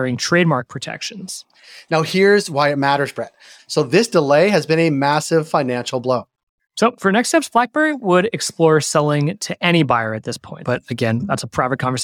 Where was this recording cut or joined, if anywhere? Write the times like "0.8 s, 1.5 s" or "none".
3.6 s, 10.6 s